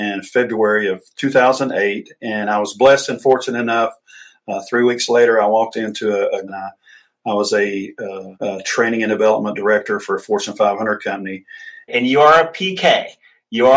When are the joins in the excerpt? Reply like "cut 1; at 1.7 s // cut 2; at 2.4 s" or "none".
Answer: cut 1; at 6.5 s // cut 2; at 8.3 s // cut 3; at 11.9 s